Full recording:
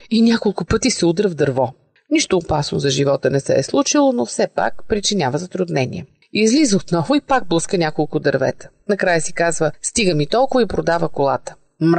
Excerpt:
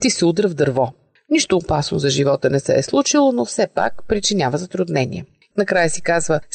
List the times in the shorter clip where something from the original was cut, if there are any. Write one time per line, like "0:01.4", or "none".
0:05.5